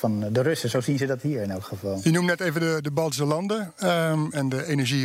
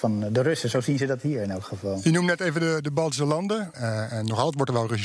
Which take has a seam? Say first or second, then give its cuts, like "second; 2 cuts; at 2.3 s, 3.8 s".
second; 1 cut; at 3.7 s